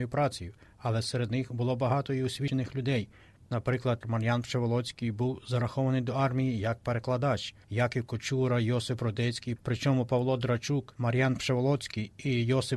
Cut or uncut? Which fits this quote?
cut